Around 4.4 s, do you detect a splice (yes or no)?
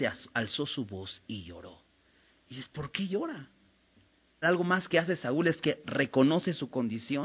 yes